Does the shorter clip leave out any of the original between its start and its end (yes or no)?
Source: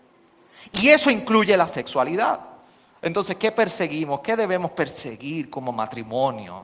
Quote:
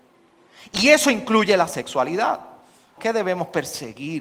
yes